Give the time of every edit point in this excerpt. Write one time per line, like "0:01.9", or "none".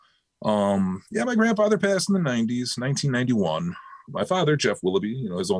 none